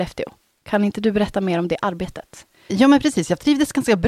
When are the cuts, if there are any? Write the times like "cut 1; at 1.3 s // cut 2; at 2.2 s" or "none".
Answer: cut 1; at 2.7 s